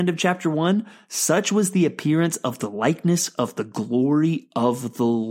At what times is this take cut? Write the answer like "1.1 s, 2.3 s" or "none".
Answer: none